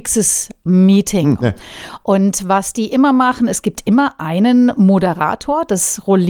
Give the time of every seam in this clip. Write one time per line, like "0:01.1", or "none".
0:01.4